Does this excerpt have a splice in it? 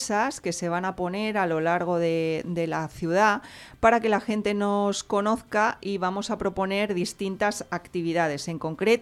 no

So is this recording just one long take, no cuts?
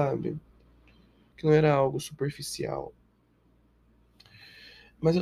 no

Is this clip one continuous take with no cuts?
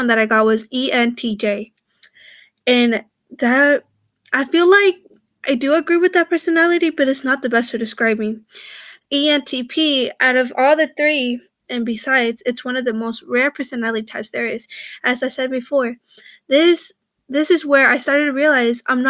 no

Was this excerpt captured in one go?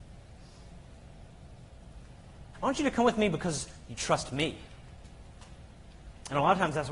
no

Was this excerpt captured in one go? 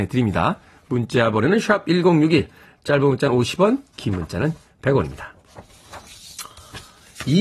yes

